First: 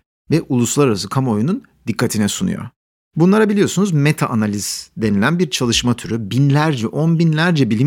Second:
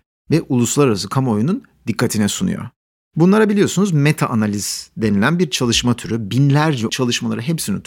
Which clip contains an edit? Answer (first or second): second